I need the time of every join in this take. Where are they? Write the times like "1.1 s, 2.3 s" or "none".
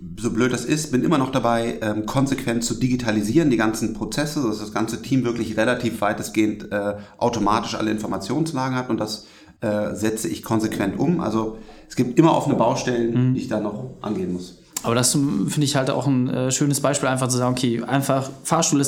none

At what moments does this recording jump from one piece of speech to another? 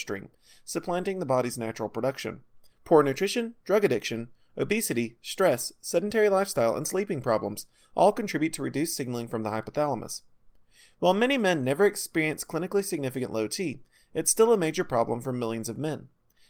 2.7 s

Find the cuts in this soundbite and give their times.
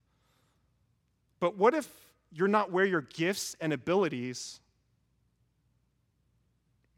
none

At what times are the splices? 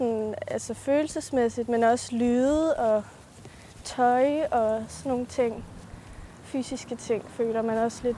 none

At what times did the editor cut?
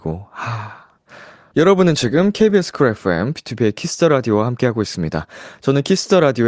1.5 s

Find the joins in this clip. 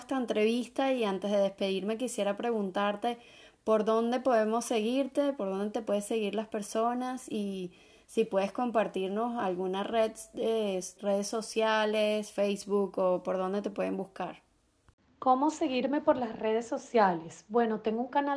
11.0 s

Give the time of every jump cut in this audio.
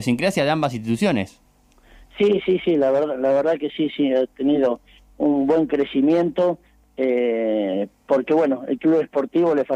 none

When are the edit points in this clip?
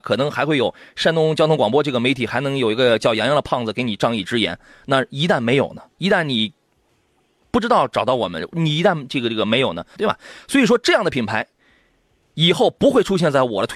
10.0 s

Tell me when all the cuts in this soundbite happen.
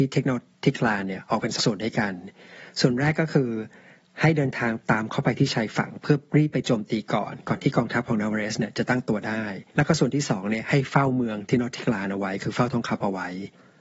1.6 s, 9.7 s

